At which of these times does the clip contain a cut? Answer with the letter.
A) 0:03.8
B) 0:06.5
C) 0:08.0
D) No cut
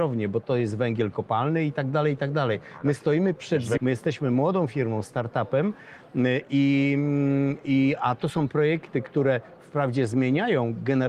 A